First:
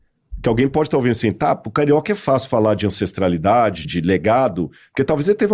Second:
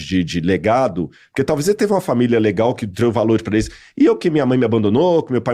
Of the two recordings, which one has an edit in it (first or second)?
first